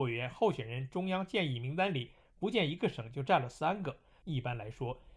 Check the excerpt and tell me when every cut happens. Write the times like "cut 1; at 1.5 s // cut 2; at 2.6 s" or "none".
cut 1; at 4.2 s